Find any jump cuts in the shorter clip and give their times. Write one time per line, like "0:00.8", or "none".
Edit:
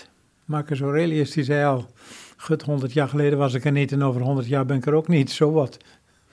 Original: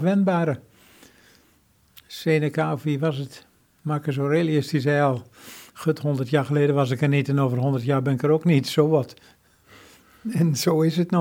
none